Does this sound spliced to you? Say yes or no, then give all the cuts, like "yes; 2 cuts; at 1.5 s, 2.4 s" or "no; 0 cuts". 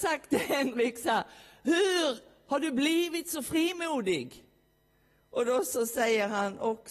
no; 0 cuts